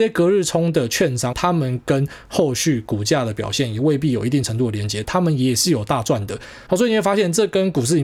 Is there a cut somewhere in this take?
yes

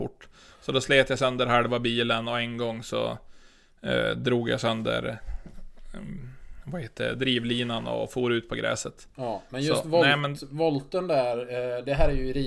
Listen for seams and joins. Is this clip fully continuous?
yes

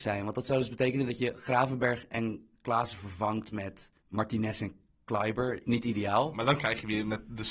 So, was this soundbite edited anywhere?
yes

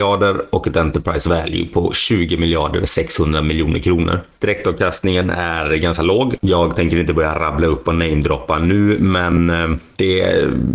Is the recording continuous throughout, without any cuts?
no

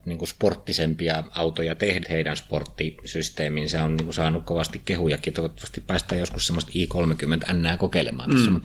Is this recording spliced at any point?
yes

